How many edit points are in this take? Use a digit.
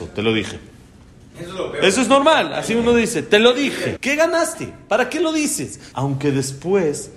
2